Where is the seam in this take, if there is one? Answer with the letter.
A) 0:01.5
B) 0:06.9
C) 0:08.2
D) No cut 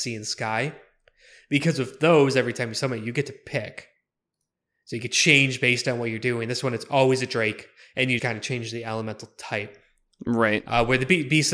C